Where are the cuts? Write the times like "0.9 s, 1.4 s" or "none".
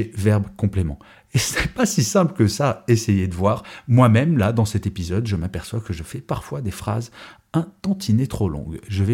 none